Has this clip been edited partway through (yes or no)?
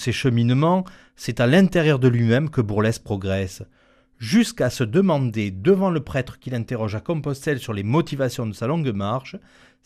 no